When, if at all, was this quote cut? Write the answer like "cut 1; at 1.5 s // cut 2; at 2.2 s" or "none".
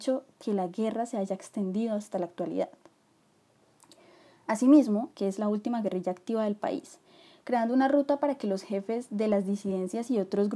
cut 1; at 5.1 s